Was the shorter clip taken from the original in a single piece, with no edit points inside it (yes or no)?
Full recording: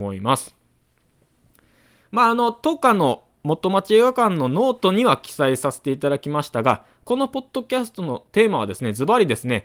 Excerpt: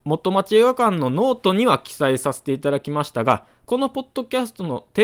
yes